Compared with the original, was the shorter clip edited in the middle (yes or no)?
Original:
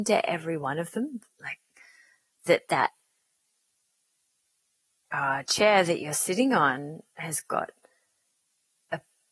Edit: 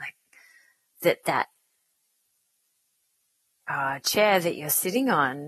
no